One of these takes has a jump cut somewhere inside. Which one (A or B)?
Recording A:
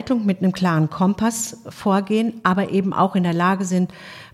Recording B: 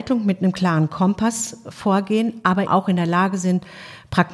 B